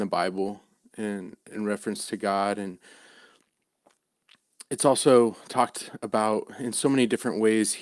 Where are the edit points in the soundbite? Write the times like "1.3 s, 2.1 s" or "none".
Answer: none